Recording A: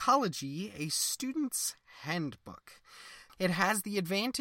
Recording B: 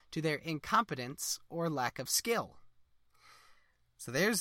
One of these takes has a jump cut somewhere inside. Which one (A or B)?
A